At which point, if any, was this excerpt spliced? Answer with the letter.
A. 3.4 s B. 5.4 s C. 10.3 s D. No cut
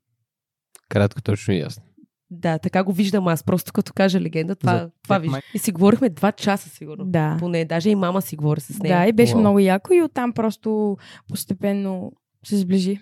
B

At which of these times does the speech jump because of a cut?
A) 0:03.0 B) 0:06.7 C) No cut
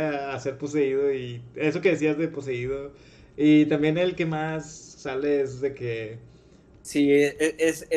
B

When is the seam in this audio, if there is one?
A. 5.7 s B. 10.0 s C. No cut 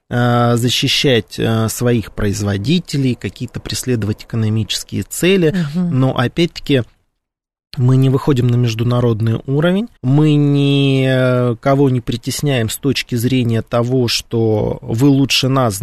B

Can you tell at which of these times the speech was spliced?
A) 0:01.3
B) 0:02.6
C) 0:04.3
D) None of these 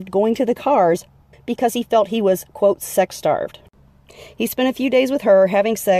A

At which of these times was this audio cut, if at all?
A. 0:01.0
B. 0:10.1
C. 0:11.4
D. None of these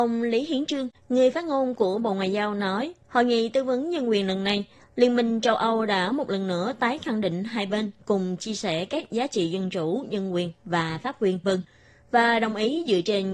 C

